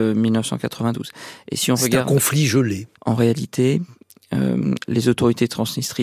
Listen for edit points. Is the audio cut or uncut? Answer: cut